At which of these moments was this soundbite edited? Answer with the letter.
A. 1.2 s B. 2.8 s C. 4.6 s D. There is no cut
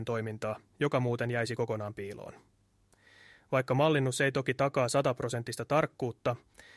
D